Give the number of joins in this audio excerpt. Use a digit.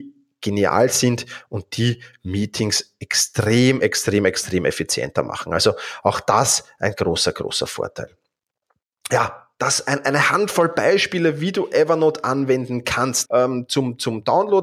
1